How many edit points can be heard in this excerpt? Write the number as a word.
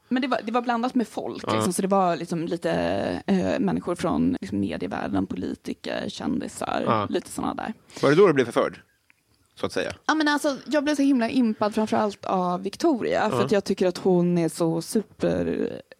one